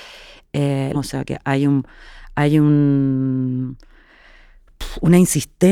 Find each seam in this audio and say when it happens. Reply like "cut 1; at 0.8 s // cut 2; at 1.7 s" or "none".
cut 1; at 0.9 s